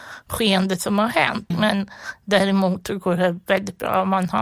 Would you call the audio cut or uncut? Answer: cut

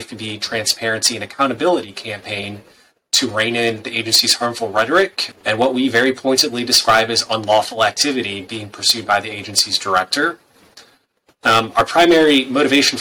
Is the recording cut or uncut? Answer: cut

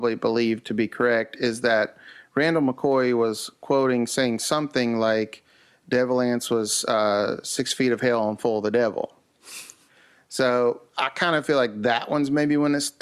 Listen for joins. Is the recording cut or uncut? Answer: uncut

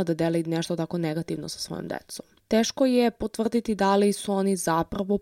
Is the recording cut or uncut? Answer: uncut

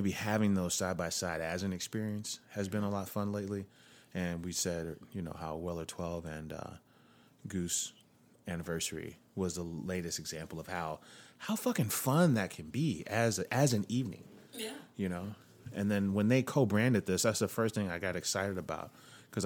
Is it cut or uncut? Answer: uncut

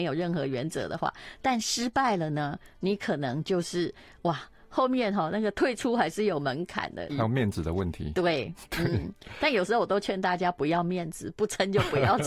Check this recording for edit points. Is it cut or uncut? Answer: cut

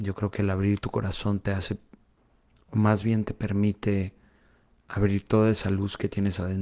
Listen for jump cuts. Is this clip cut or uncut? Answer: uncut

